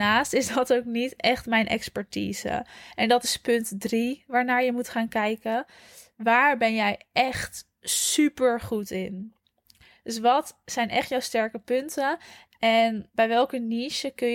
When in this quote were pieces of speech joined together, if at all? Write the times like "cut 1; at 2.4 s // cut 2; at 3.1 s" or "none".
none